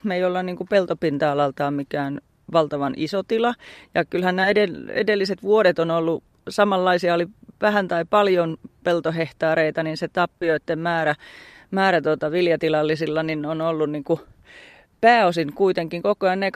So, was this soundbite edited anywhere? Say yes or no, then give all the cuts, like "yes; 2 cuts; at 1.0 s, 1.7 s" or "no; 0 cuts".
no; 0 cuts